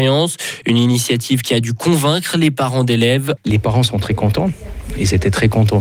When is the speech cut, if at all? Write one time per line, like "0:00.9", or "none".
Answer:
0:03.4